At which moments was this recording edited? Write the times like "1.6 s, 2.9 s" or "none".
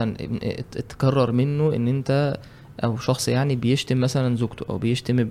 none

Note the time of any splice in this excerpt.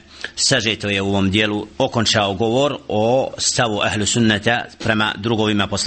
1.7 s

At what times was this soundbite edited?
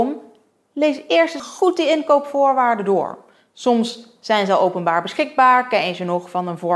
1.4 s

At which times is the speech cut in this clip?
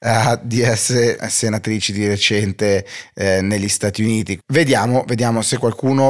4.4 s

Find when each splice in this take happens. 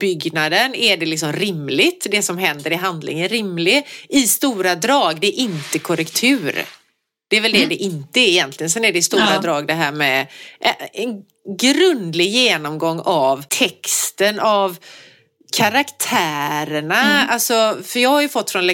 13.5 s

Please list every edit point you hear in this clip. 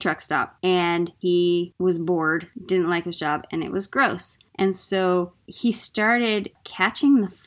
none

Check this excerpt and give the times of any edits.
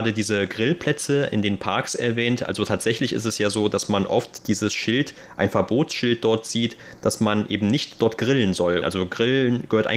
8.8 s

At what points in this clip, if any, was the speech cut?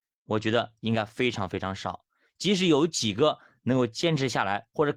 none

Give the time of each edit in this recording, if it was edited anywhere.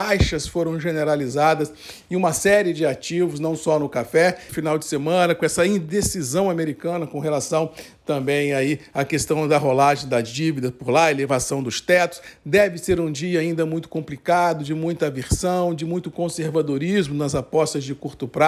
4.5 s

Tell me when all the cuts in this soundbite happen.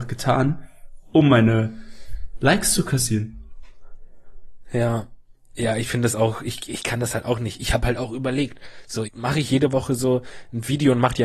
6.7 s, 9.1 s

